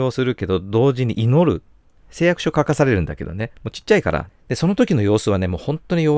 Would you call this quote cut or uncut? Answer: cut